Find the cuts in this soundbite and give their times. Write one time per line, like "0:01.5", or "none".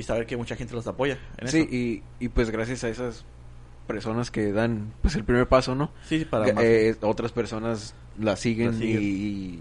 none